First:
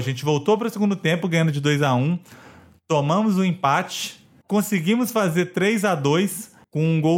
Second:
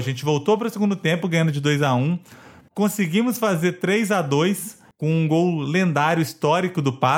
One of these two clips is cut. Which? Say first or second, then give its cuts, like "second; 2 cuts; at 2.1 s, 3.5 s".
second; 1 cut; at 2.6 s